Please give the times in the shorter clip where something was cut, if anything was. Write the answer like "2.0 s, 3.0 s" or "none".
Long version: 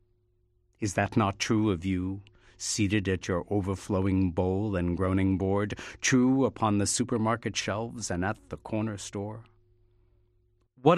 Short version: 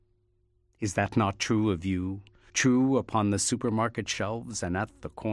2.5 s

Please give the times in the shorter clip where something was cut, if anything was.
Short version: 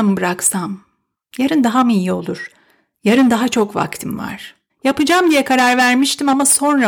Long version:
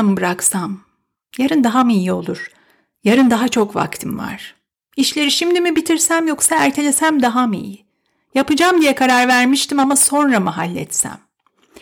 4.7 s

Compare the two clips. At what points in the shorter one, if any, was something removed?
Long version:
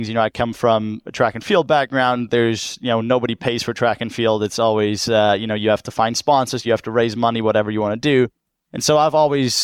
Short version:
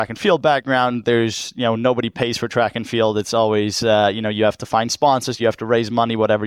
none

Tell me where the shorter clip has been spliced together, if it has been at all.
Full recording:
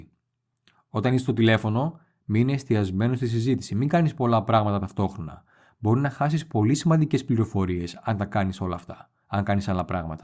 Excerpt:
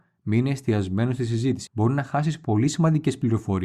1.7 s

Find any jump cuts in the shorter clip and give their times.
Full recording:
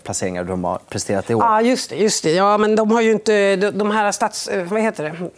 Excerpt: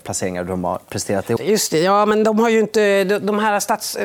1.4 s

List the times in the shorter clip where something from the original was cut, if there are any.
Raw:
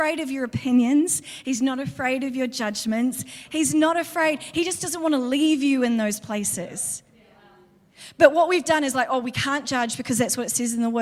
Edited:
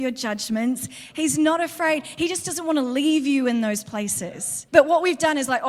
4.7 s

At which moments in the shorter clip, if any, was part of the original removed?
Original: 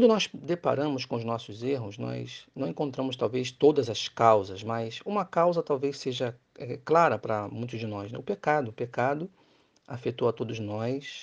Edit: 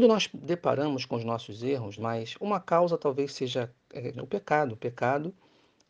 2.0 s, 4.1 s

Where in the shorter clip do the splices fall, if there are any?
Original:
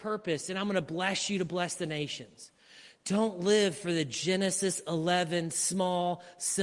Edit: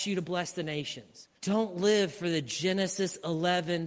1.4 s

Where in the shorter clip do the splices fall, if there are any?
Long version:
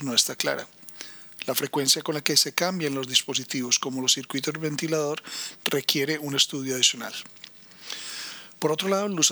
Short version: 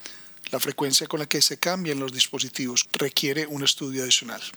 2.8 s

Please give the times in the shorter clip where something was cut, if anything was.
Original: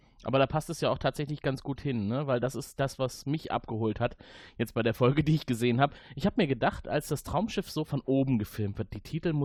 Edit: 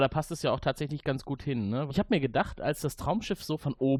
1.9 s

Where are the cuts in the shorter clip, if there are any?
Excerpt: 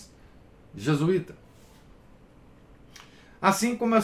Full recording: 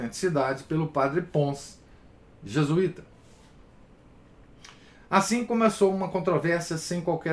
none

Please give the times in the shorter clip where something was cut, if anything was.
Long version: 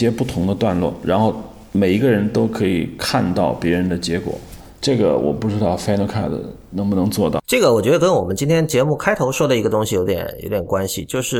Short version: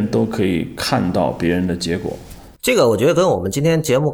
2.6 s

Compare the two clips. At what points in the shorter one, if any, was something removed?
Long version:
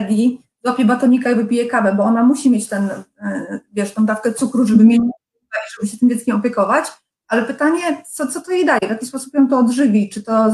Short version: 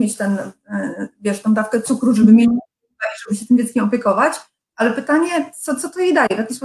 none

